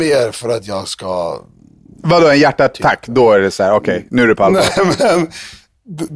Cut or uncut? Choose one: uncut